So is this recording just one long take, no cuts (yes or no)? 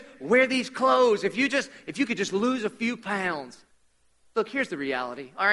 yes